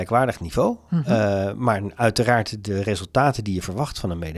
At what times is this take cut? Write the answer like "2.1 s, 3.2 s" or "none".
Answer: none